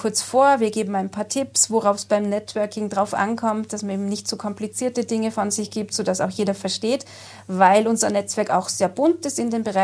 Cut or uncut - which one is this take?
uncut